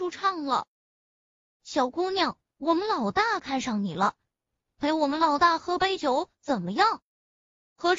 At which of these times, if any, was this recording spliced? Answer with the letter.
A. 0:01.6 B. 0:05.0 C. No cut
A